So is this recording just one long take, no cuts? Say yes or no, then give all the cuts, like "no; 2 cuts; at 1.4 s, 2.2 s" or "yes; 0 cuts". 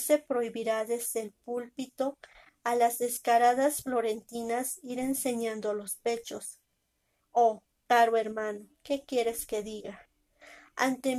no; 2 cuts; at 7.2 s, 8.7 s